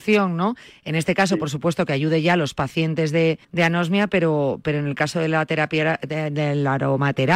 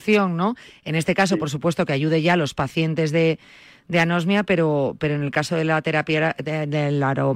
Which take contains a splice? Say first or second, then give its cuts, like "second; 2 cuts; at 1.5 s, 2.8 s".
first; 1 cut; at 3.4 s